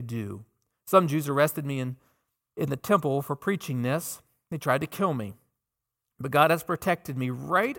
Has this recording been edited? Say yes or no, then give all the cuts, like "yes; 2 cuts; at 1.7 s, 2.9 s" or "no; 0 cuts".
no; 0 cuts